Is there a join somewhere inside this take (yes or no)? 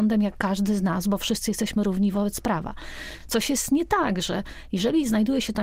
no